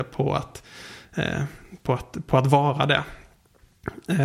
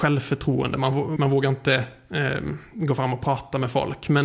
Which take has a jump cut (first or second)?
second